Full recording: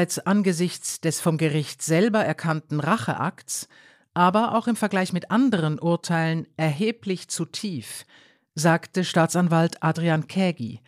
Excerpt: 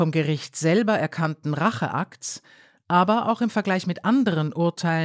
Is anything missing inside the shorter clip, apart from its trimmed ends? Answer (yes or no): no